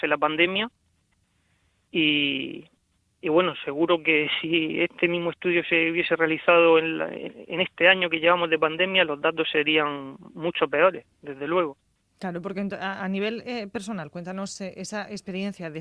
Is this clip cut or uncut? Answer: uncut